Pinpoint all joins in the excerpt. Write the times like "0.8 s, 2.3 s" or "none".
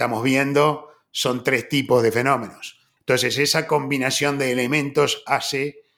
3.0 s